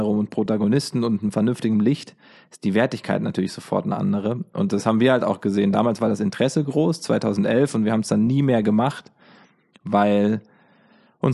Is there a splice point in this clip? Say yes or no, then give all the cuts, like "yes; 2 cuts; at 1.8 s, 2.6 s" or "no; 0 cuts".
no; 0 cuts